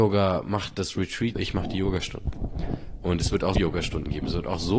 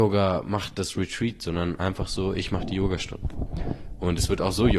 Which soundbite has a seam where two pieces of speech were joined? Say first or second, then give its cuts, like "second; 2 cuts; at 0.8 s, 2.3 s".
first; 2 cuts; at 1.4 s, 3.6 s